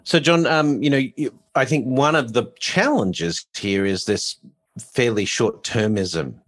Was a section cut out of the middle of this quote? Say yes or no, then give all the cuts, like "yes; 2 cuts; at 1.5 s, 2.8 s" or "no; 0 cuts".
no; 0 cuts